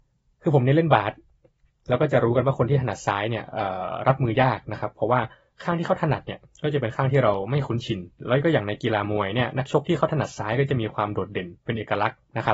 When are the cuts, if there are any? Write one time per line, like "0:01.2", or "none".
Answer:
0:08.2